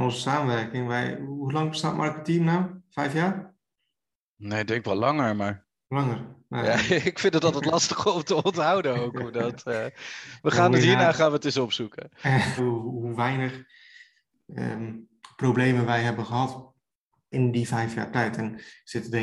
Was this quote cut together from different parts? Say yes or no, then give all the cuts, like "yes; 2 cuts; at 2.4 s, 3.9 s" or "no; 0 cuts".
yes; 2 cuts; at 12.6 s, 17.3 s